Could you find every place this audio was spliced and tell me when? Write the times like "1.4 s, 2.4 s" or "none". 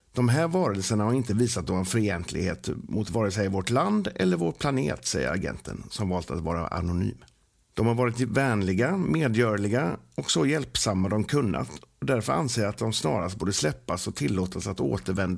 none